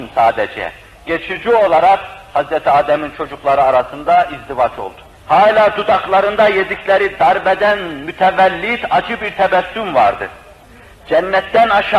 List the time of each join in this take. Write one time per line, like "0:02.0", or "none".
0:05.1